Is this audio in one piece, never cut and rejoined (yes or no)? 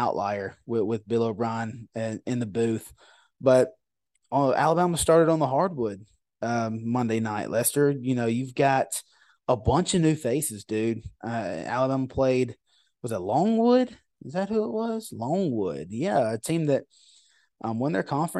yes